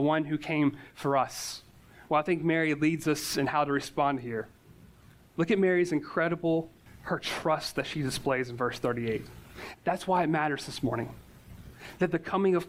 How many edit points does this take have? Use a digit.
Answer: 2